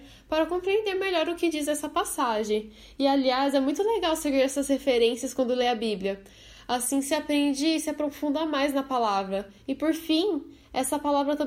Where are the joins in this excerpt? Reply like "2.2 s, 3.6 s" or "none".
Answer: none